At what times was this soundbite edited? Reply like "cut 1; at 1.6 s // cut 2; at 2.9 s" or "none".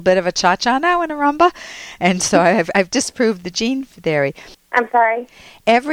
cut 1; at 4.5 s